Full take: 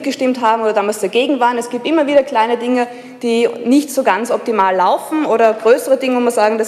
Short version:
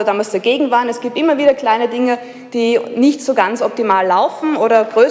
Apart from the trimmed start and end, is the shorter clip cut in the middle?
no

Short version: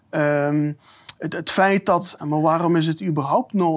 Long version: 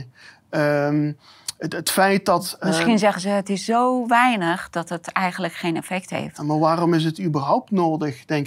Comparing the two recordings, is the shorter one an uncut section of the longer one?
no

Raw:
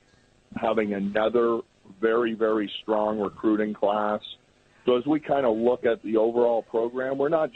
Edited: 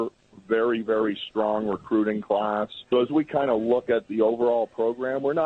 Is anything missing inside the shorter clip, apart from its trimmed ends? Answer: yes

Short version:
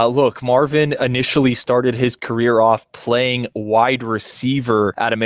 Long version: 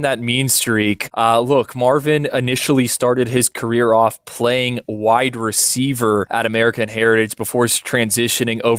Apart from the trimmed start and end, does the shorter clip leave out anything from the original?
no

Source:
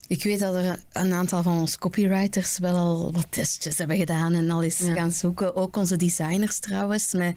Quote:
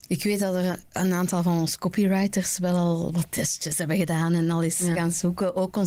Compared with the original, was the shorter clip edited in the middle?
no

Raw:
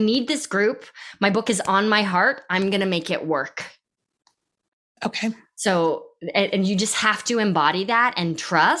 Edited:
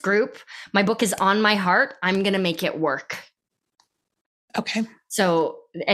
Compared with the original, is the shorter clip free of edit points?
yes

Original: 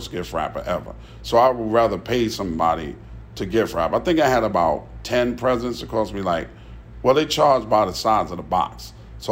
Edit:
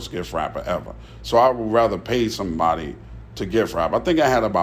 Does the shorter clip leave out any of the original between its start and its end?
no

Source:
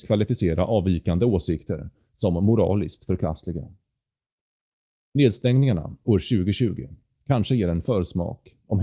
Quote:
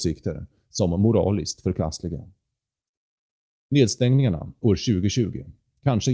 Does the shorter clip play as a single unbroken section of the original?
yes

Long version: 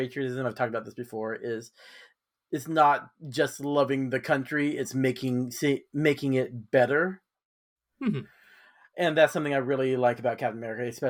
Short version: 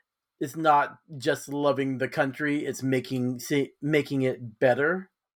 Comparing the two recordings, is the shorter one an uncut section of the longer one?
yes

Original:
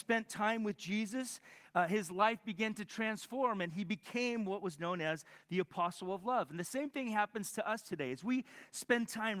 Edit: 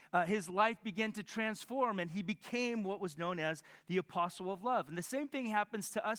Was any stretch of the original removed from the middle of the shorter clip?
no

